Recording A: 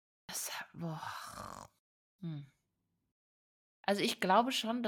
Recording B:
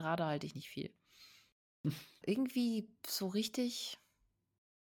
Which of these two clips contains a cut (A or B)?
B